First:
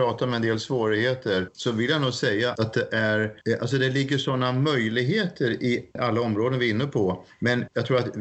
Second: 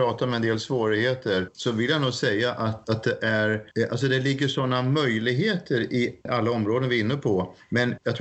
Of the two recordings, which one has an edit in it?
first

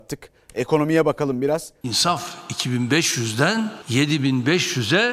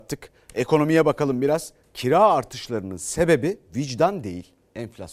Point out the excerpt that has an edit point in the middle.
first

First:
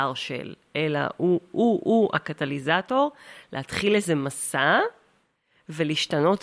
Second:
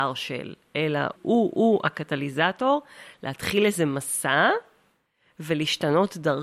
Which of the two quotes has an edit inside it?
second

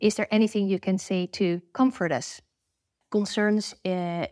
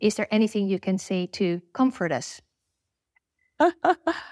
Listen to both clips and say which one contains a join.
first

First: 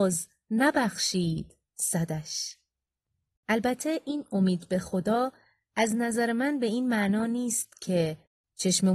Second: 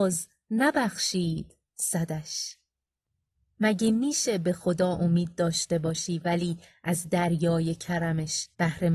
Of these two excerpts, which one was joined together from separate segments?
first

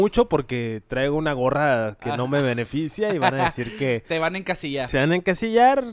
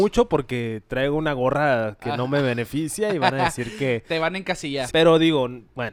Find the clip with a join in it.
second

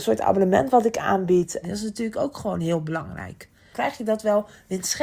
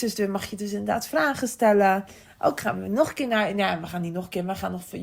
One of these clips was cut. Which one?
first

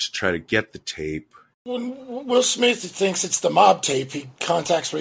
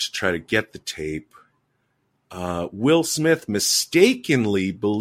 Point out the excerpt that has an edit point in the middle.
first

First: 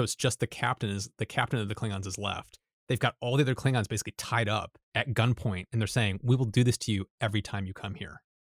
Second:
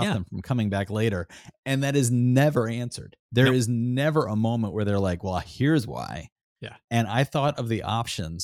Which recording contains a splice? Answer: first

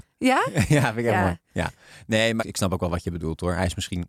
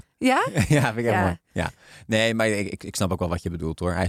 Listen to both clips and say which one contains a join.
first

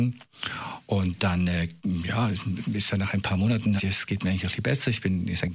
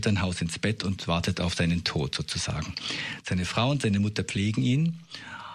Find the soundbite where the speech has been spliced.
first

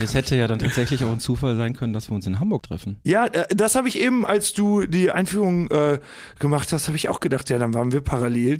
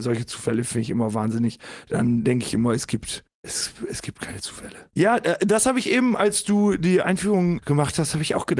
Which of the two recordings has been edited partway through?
second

